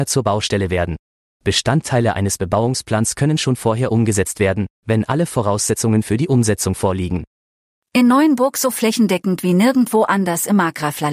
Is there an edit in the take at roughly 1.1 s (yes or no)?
no